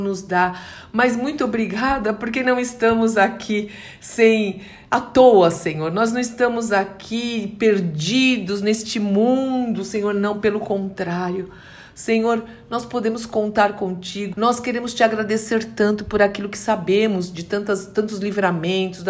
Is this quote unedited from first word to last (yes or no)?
no